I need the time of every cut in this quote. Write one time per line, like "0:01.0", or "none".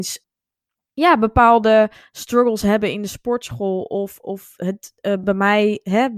none